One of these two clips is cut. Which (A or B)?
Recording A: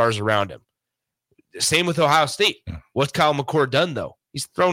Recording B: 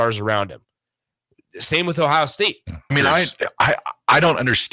B